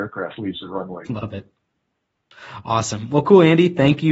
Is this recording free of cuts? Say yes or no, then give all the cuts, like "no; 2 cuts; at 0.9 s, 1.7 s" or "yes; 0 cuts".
no; 1 cut; at 1.1 s